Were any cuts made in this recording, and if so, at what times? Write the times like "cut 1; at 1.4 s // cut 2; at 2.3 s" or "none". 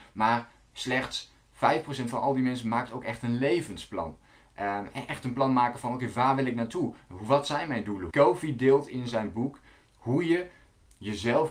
cut 1; at 8.1 s